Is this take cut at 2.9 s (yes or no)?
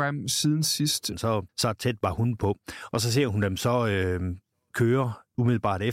no